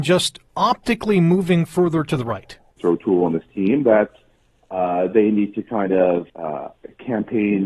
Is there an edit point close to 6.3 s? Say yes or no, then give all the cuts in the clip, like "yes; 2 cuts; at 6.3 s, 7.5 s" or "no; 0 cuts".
yes; 2 cuts; at 2.8 s, 6.3 s